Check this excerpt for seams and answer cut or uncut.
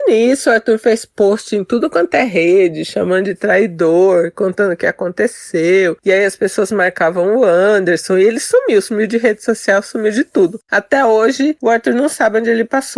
uncut